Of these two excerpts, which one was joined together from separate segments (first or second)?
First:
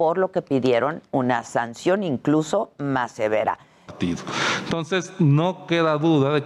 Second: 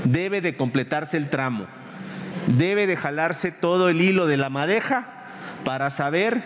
first